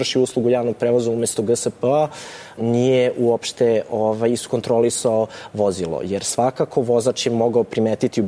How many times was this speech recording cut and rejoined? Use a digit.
1